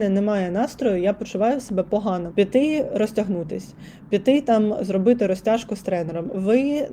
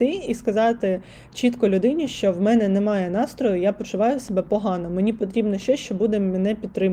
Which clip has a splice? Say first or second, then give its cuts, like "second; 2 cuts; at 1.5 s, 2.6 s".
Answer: first; 1 cut; at 2.3 s